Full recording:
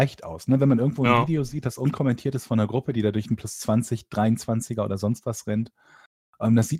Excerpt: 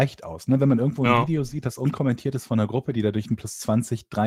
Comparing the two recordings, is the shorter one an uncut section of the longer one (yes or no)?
yes